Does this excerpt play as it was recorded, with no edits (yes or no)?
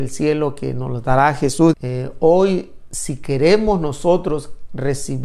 no